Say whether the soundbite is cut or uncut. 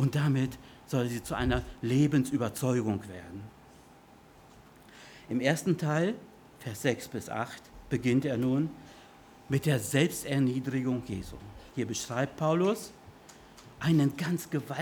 cut